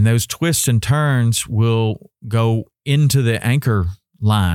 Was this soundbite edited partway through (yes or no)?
no